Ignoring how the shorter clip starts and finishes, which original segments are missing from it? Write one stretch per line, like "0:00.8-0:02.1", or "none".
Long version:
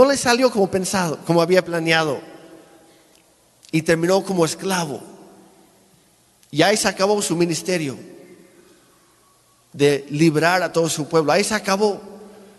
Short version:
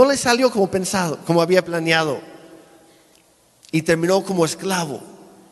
none